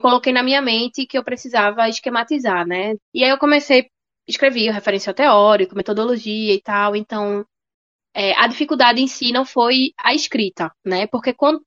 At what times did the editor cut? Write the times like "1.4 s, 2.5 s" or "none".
3.0 s